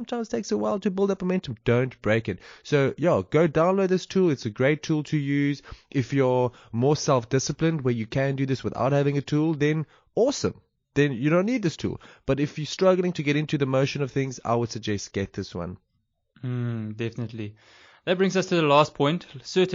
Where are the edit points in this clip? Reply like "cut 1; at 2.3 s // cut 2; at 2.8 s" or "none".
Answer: none